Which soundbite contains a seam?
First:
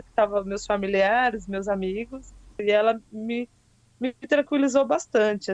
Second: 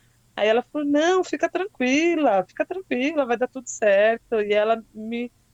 first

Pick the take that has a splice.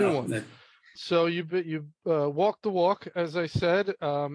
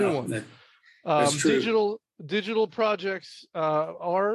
first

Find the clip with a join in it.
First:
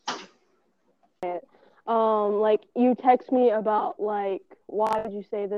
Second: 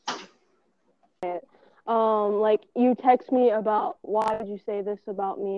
second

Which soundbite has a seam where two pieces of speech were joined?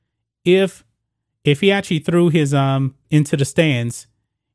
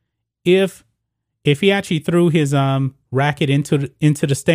first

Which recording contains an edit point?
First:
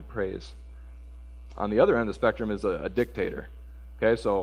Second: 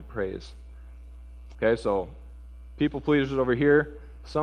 second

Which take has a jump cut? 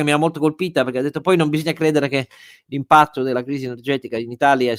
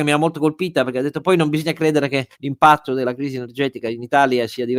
second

